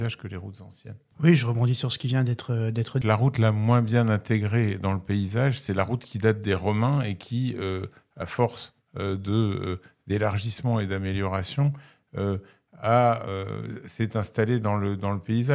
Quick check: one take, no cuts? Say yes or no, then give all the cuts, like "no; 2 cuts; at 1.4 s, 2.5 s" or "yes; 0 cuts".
no; 2 cuts; at 1.1 s, 3.0 s